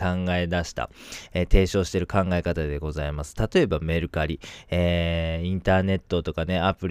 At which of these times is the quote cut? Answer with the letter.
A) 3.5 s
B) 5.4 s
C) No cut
C